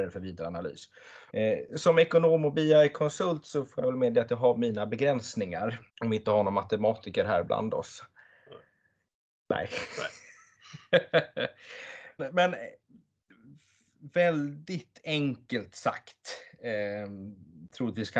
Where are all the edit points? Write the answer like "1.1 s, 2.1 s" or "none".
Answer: 1.3 s, 5.9 s, 12.2 s